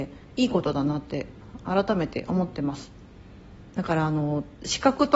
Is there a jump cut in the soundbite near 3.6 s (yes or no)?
yes